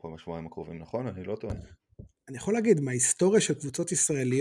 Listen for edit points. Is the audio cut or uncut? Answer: cut